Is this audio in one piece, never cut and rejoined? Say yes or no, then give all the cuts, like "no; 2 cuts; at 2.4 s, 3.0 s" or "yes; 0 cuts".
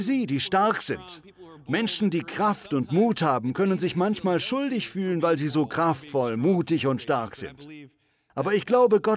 yes; 0 cuts